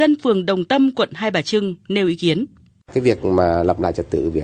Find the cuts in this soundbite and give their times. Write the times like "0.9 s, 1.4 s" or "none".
none